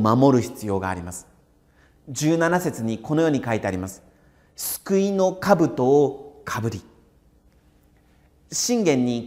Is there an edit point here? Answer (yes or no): no